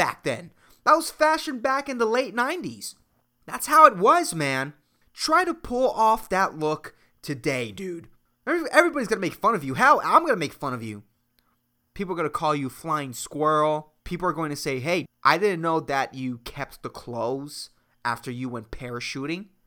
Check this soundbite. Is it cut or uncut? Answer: cut